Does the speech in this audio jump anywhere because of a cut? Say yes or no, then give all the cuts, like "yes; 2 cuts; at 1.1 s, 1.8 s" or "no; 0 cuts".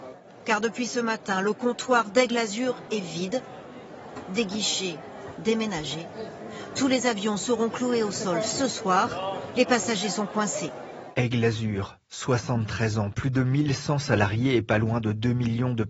no; 0 cuts